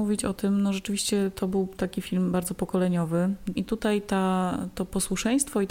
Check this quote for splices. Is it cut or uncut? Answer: cut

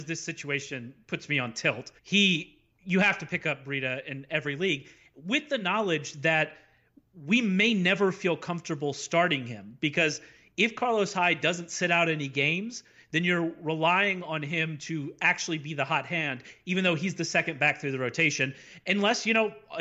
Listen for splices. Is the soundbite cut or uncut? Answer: cut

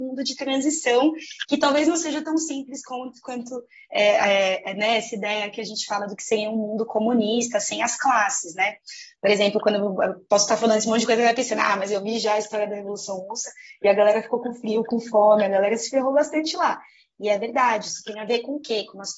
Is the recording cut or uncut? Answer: uncut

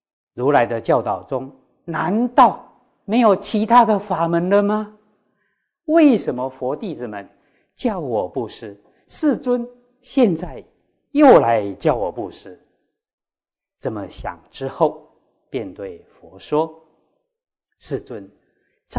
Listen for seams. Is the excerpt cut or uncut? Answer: uncut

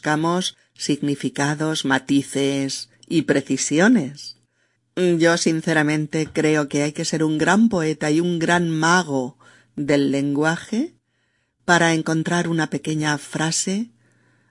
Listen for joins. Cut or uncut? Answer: cut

